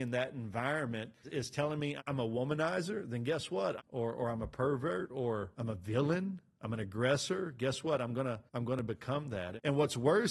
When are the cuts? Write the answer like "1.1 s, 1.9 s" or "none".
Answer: 3.8 s, 8.5 s